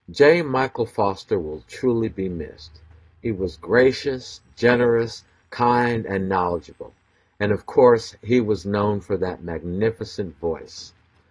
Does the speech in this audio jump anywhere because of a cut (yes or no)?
no